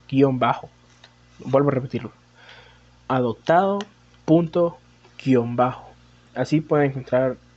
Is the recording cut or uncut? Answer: uncut